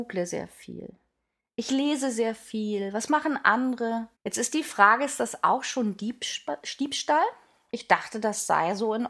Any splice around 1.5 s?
no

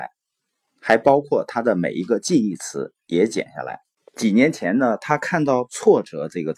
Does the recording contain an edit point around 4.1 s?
yes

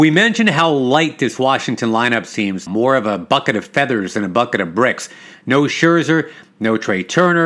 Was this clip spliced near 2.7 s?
yes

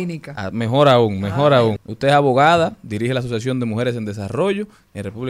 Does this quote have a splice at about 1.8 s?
yes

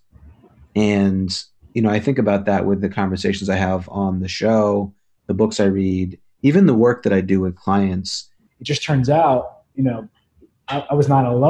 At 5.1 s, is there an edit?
no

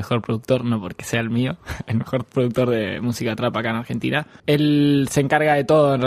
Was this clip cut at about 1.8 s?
no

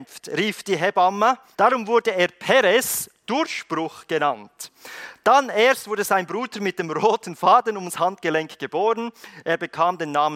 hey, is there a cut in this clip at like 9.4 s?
no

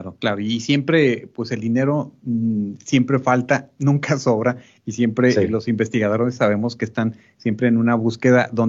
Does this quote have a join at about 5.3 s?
no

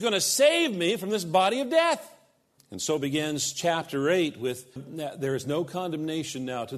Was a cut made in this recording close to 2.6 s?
yes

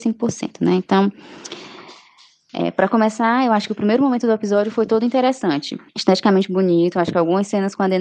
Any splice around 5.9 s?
yes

